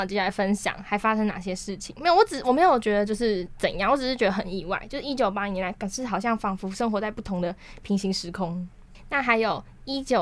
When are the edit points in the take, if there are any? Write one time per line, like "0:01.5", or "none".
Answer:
none